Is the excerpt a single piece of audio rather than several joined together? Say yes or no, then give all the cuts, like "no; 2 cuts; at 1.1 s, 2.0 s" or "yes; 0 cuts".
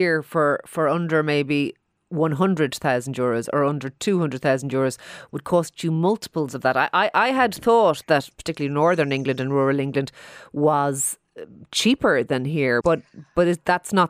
no; 2 cuts; at 8.0 s, 12.8 s